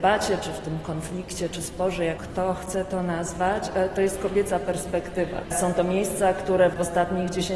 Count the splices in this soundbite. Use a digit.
2